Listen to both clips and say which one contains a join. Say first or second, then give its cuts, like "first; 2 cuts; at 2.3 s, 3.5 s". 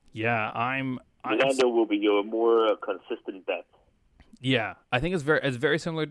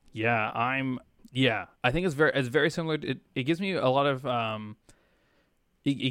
second; 1 cut; at 1.2 s